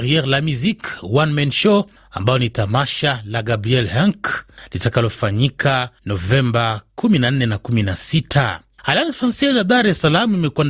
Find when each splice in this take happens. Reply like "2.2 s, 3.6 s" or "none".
8.8 s

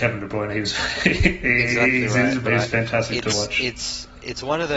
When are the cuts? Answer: 2.5 s

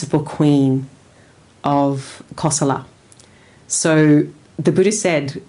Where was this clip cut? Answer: none

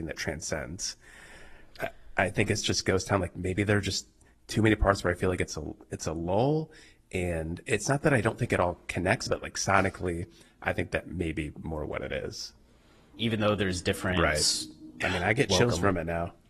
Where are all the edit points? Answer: 9.3 s, 13.1 s, 15.0 s

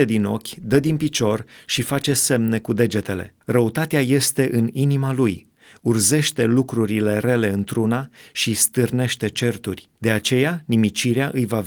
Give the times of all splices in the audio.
3.4 s, 10.0 s

